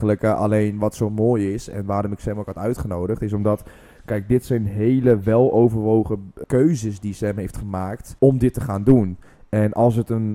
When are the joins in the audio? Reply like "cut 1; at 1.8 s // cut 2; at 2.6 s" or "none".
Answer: cut 1; at 6.4 s // cut 2; at 8.2 s

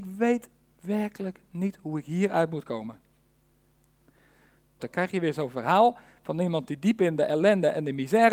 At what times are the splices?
cut 1; at 4.8 s

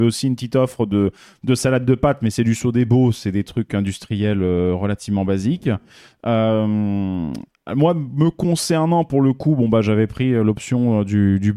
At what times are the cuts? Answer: none

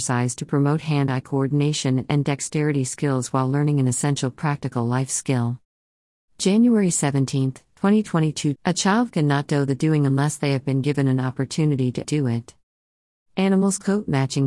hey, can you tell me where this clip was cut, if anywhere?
cut 1; at 8.6 s // cut 2; at 12.0 s

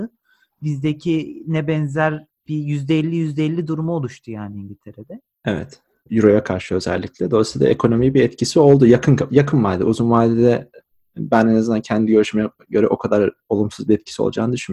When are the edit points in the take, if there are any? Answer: cut 1; at 6.1 s

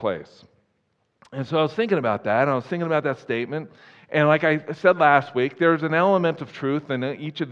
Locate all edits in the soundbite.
none

